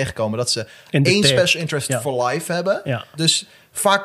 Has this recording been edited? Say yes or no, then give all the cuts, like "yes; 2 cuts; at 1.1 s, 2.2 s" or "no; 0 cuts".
no; 0 cuts